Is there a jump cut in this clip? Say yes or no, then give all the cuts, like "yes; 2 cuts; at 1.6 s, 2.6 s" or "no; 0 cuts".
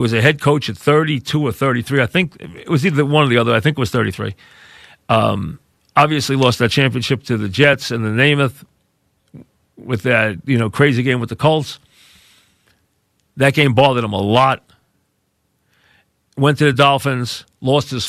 no; 0 cuts